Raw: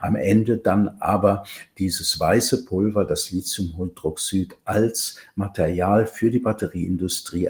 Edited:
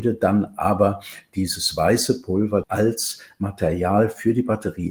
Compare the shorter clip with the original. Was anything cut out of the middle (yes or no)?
yes